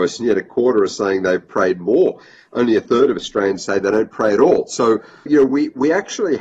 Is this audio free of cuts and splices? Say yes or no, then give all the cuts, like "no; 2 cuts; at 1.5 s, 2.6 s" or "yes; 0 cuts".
no; 1 cut; at 5.3 s